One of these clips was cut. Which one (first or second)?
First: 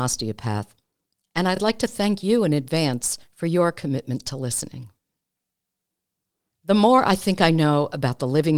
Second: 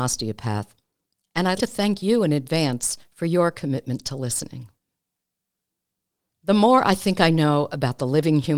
second